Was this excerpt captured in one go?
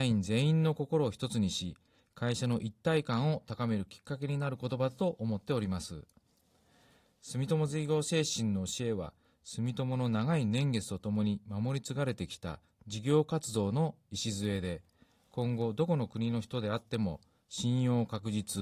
yes; 0 cuts

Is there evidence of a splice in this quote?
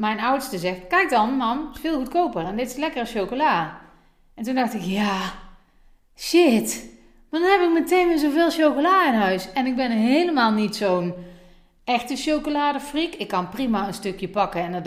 no; 0 cuts

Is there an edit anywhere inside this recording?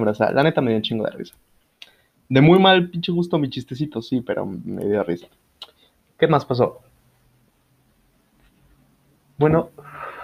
no; 0 cuts

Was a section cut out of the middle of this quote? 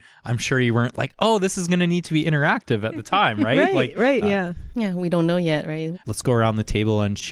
yes; 2 cuts; at 4.2 s, 5.9 s

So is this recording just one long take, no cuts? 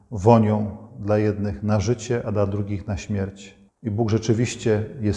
yes; 0 cuts

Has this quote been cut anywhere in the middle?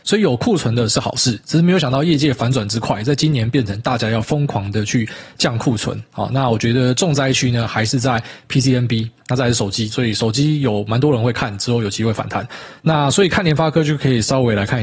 yes; 2 cuts; at 9.9 s, 12.8 s

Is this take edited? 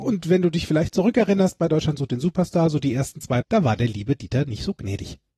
yes; 1 cut; at 3.4 s

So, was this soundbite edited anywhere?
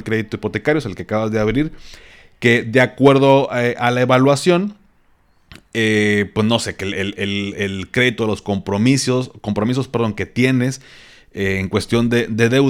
no; 0 cuts

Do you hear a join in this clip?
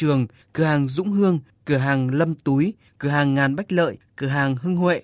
yes; 1 cut; at 2.9 s

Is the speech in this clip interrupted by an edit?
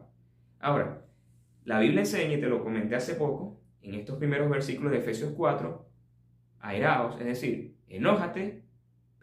no; 0 cuts

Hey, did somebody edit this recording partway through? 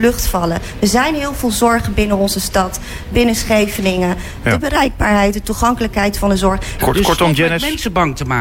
yes; 2 cuts; at 4.4 s, 6.8 s

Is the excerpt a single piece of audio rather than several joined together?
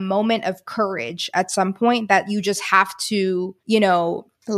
no; 1 cut; at 3.6 s

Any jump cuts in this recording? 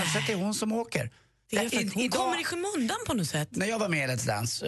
no; 0 cuts

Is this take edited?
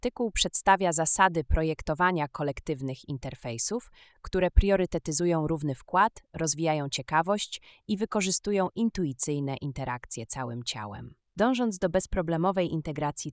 no; 0 cuts

